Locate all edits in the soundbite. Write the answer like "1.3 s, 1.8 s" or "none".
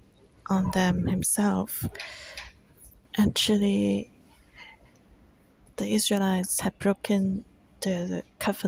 3.1 s

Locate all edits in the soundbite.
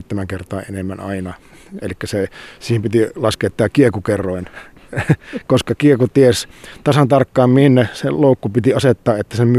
none

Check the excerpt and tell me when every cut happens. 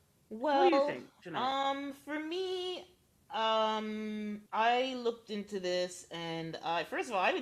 4.5 s

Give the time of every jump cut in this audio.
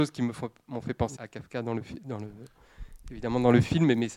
1.2 s

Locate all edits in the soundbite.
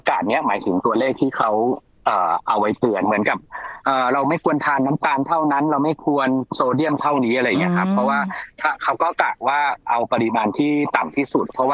none

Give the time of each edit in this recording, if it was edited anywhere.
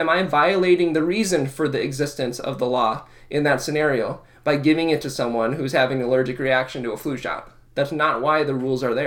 7.7 s

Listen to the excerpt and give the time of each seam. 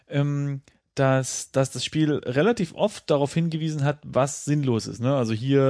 none

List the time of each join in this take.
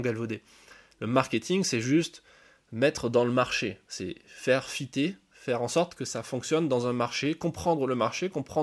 none

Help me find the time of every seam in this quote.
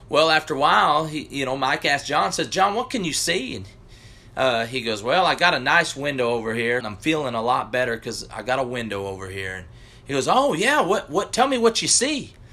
6.8 s

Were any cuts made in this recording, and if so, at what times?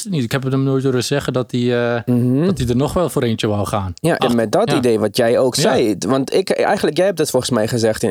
4.2 s

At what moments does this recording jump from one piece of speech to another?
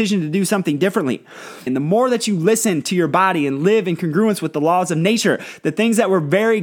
1.7 s

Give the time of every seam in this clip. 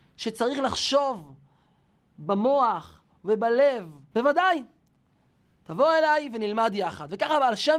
4.1 s

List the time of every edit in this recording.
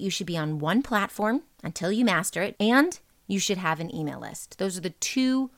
2.5 s

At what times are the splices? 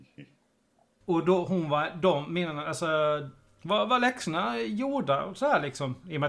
1.2 s, 3.6 s

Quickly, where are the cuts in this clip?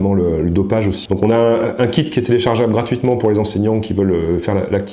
1.1 s

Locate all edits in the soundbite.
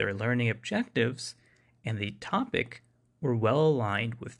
none

